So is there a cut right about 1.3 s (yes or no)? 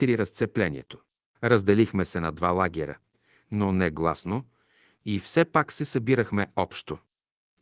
yes